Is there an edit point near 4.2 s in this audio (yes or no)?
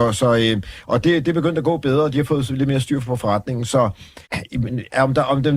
yes